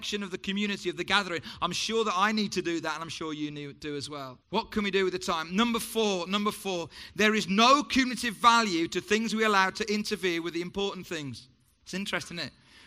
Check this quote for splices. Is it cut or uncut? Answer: cut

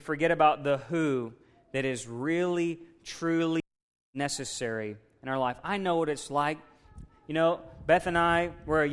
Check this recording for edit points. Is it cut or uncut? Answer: uncut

